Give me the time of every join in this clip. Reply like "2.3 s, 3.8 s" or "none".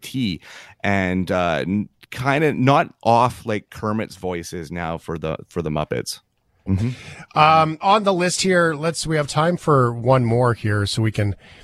6.7 s, 7.8 s